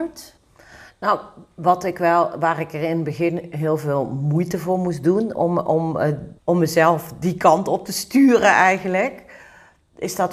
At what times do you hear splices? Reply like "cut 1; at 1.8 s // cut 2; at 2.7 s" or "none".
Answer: cut 1; at 6.4 s